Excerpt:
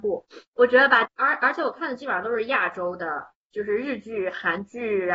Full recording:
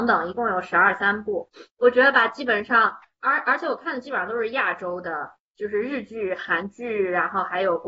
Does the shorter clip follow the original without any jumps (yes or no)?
no